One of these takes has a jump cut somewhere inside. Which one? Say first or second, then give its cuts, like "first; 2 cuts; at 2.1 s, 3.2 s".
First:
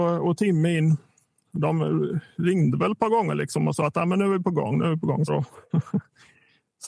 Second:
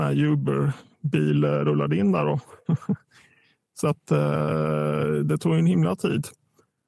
first; 1 cut; at 5.3 s